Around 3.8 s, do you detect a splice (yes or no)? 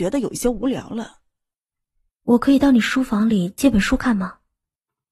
no